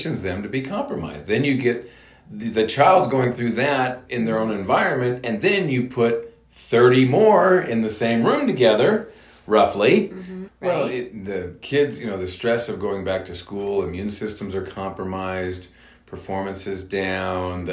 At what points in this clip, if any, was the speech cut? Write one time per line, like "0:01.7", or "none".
0:10.5